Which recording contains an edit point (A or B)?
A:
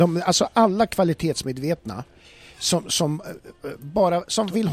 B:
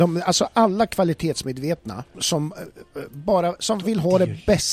B